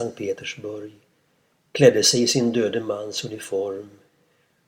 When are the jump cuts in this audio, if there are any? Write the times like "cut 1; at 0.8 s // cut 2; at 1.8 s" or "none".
none